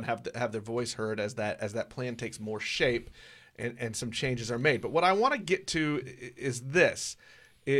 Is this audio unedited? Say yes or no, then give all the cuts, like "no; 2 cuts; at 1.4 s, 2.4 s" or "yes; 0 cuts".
no; 1 cut; at 6.0 s